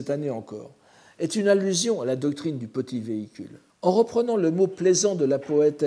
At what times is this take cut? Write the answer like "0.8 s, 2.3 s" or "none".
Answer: 3.7 s

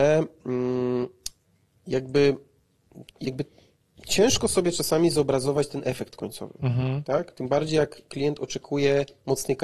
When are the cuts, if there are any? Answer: 3.1 s

